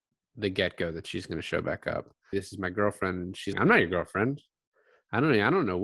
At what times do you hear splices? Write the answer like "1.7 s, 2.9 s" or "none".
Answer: 2.3 s, 3.5 s

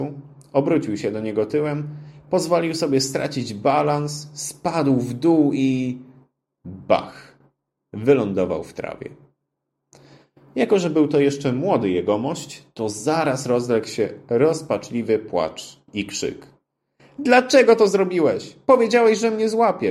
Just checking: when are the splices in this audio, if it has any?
none

